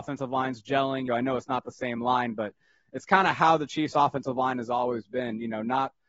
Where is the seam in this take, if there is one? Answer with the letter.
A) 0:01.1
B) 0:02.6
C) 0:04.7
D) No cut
A